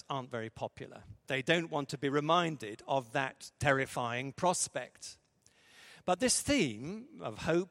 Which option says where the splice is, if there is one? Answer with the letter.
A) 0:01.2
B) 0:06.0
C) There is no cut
A